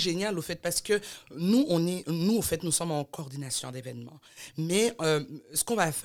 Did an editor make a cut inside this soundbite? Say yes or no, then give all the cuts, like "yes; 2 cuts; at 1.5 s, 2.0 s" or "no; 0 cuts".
no; 0 cuts